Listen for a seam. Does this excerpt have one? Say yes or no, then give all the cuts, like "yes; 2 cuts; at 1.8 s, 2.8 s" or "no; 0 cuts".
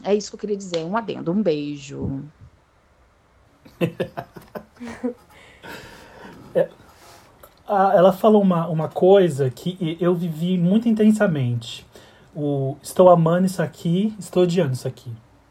no; 0 cuts